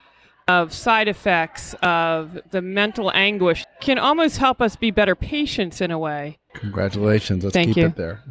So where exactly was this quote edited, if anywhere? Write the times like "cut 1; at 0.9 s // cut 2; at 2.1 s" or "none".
cut 1; at 3.6 s // cut 2; at 6.5 s